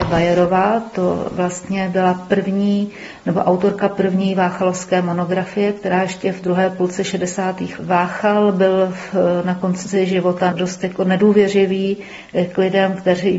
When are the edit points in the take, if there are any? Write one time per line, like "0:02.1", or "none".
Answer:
0:07.8
0:10.5